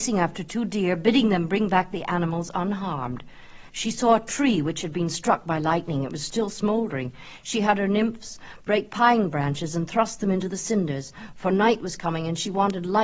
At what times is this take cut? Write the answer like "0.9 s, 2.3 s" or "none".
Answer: 3.7 s